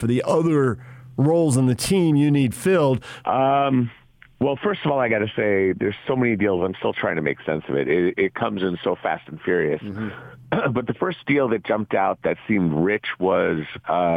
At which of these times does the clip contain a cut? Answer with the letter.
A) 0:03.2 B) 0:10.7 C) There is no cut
A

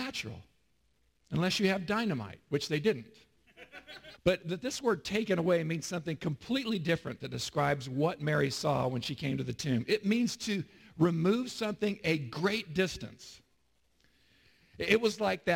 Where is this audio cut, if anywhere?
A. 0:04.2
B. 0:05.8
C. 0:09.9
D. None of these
A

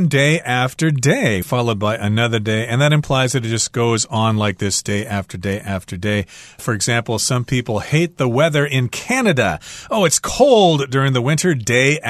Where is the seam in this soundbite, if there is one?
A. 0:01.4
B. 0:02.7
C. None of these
A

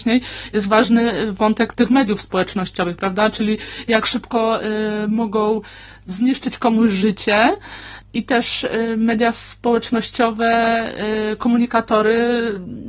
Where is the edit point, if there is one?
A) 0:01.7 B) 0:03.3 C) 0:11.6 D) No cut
A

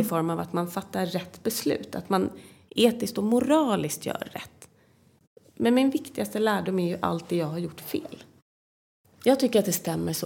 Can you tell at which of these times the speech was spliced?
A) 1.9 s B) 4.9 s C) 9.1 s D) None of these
C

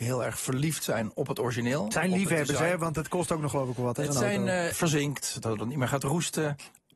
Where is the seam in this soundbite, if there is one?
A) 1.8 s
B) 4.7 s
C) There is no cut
B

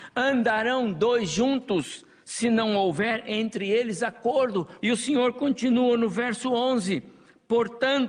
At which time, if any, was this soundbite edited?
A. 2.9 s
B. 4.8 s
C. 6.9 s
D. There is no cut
B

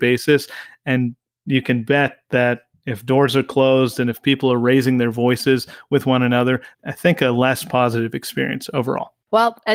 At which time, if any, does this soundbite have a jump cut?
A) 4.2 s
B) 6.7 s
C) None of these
B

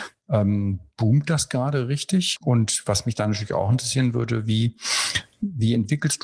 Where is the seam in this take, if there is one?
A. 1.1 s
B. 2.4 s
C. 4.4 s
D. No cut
B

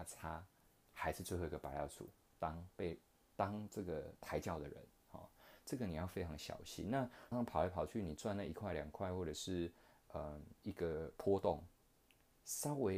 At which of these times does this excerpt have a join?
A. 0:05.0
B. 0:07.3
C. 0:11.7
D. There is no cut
B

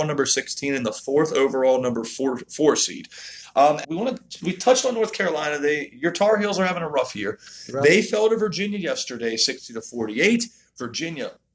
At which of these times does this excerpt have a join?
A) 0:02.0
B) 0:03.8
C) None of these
B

